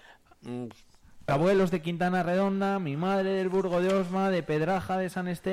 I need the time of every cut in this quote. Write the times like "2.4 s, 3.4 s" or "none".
1.3 s